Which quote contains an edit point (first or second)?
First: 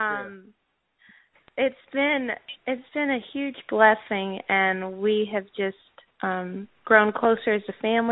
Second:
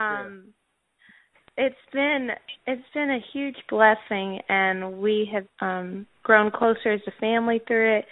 second